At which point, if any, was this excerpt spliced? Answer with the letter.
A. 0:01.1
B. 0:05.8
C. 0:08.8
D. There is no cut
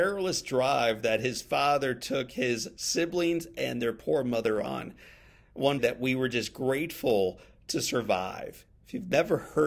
B